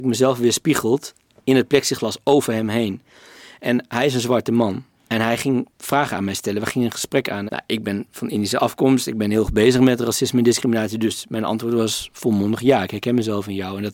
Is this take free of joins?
no; 2 cuts; at 5.7 s, 7.5 s

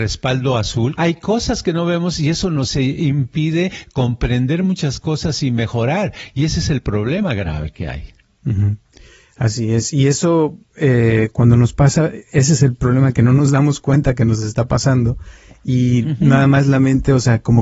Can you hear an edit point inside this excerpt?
yes; 1 cut; at 1.0 s

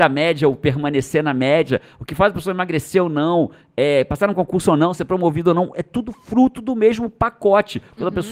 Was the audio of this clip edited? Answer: no; 0 cuts

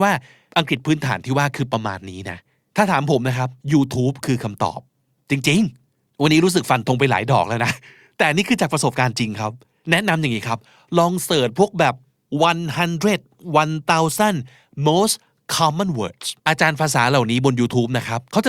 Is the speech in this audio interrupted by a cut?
yes; 2 cuts; at 3.6 s, 16.4 s

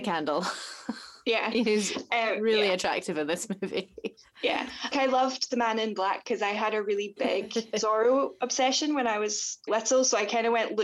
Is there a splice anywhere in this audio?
yes; 2 cuts; at 4.9 s, 9.7 s

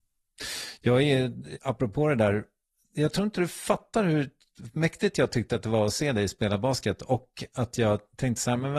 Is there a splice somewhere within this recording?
yes; 1 cut; at 1.5 s

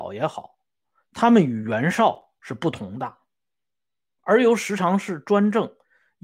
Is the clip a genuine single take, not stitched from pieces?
no; 2 cuts; at 1.1 s, 4.2 s

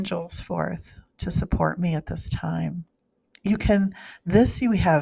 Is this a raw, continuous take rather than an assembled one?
yes; 0 cuts

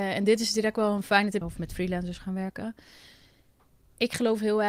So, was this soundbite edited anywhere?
yes; 1 cut; at 1.4 s

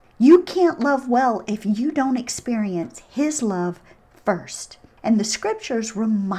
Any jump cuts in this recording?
no; 0 cuts

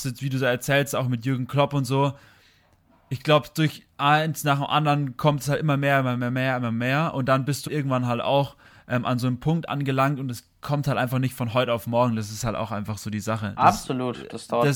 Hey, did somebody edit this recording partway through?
yes; 2 cuts; at 3.9 s, 7.7 s

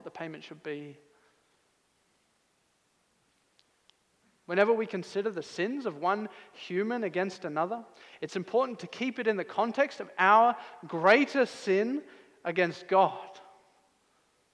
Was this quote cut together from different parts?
no; 0 cuts

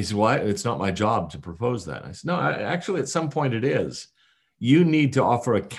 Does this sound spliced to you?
no; 0 cuts

